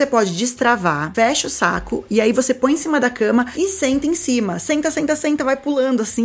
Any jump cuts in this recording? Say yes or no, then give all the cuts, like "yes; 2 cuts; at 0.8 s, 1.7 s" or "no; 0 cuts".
no; 0 cuts